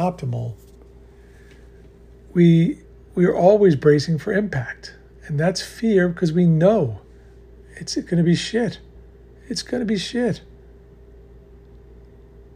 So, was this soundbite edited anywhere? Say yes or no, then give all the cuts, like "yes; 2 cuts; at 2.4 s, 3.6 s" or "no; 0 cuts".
no; 0 cuts